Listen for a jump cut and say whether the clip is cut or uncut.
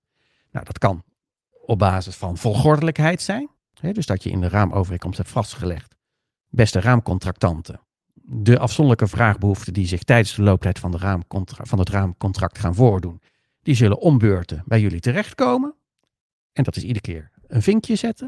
uncut